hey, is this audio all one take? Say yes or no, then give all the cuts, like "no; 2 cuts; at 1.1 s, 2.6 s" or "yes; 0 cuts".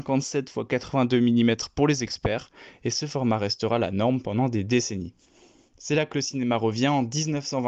yes; 0 cuts